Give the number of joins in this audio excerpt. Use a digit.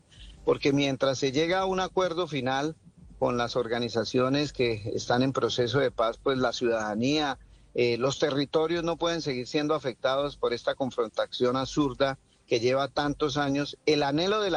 0